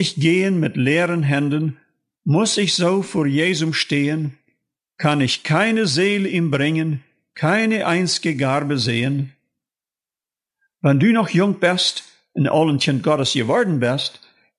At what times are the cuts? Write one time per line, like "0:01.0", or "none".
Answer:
none